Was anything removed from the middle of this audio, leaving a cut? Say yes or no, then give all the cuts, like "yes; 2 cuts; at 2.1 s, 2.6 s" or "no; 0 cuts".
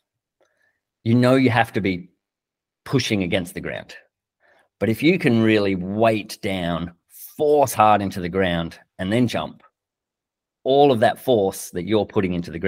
no; 0 cuts